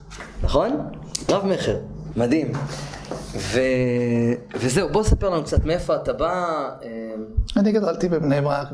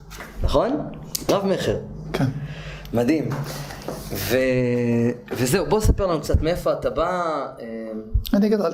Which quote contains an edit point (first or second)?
first